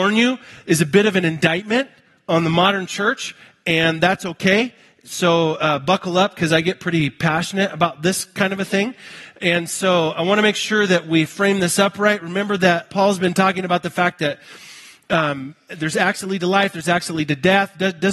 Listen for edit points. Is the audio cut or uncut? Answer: cut